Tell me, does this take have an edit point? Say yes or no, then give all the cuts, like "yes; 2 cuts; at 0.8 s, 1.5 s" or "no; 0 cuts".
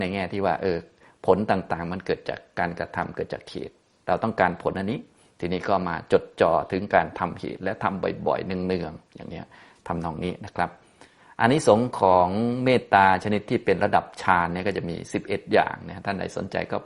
no; 0 cuts